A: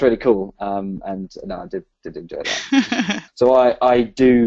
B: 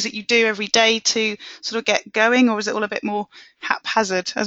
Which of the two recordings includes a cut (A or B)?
A